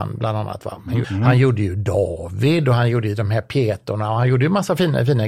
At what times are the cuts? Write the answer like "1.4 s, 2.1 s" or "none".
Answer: 1.0 s